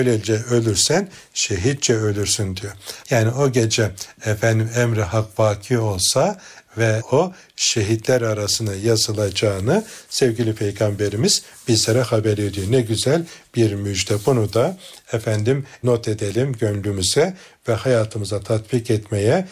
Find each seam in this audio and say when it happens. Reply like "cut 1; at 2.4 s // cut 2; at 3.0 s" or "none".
cut 1; at 3.0 s

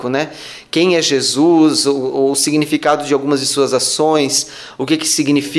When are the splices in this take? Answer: none

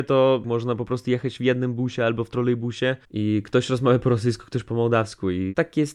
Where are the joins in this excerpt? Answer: cut 1; at 3.0 s

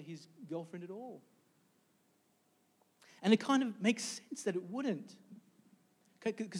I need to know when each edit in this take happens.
none

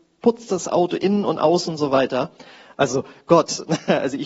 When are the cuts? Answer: cut 1; at 2.7 s

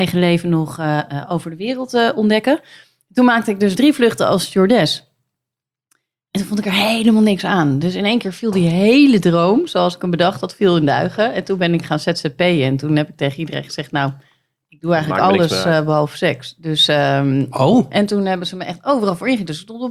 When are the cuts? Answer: none

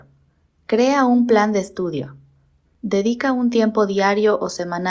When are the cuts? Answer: cut 1; at 2.6 s

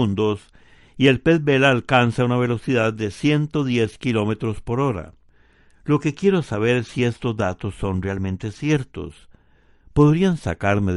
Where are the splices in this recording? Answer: none

